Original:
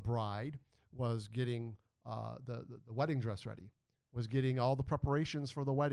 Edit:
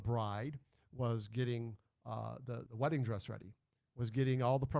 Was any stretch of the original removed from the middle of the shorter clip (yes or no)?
yes